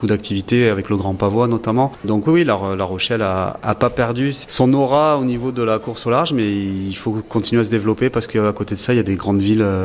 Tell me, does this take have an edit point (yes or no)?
no